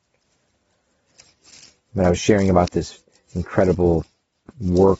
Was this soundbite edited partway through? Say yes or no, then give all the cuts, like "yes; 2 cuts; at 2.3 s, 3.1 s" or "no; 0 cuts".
no; 0 cuts